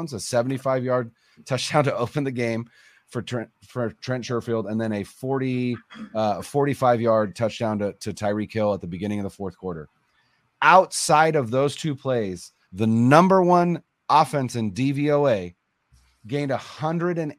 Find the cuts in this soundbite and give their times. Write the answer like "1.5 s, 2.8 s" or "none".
12.6 s

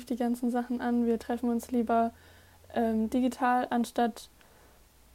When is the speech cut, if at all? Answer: none

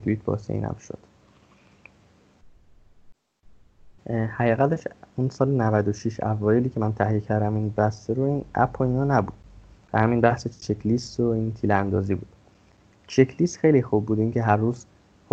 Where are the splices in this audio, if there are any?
4.0 s

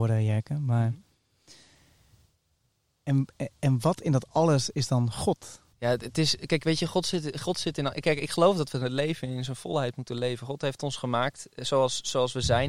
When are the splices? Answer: 5.7 s

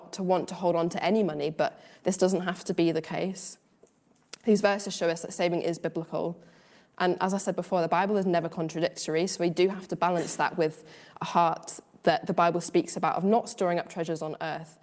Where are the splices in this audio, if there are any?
none

